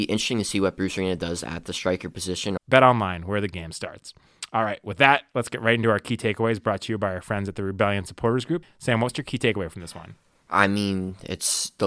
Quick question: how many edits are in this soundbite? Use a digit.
2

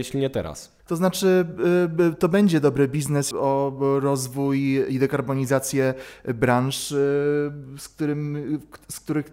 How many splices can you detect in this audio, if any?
1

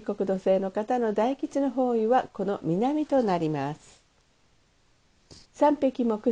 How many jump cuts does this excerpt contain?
1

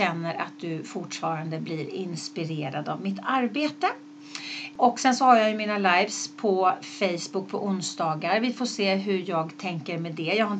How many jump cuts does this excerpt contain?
0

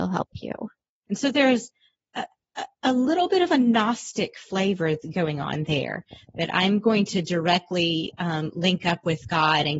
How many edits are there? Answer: 1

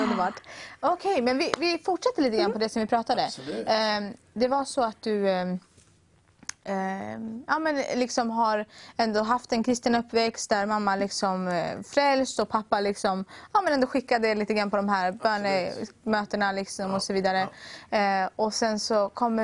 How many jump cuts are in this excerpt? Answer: 0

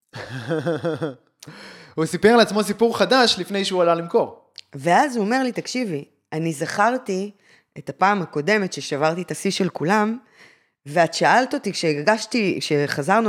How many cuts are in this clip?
0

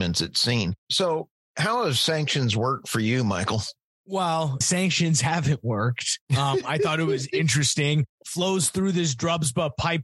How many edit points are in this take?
1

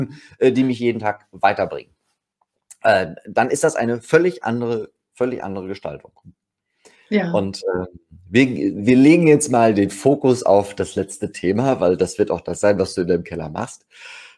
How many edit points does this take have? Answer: 0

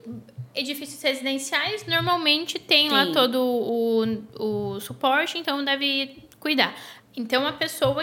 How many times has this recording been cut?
1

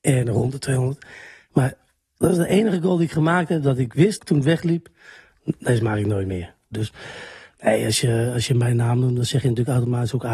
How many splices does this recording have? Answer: 2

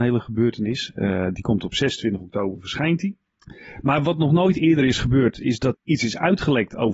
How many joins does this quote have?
1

